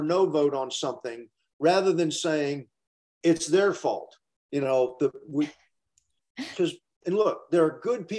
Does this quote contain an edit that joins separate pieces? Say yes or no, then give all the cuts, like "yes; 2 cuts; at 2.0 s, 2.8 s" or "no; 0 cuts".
yes; 2 cuts; at 4.4 s, 6.5 s